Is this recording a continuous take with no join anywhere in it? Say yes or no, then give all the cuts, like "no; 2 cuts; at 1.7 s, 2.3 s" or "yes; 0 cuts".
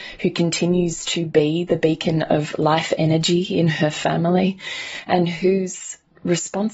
yes; 0 cuts